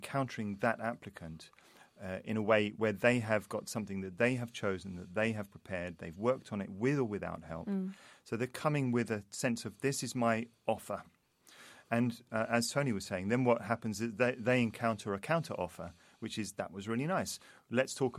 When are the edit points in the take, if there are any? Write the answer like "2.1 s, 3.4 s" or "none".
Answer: none